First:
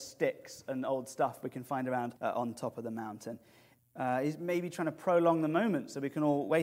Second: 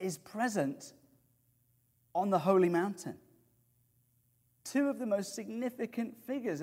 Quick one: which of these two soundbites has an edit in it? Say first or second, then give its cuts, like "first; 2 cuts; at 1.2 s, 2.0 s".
first; 2 cuts; at 2.2 s, 3.8 s